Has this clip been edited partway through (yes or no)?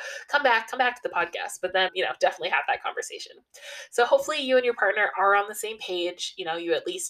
yes